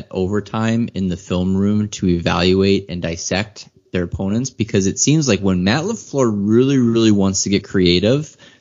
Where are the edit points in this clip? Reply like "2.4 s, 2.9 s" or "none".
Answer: none